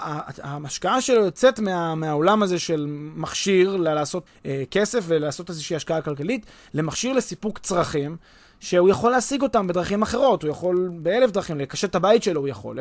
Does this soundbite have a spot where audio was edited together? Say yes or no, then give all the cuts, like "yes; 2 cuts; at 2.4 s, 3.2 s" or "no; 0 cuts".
yes; 1 cut; at 4.3 s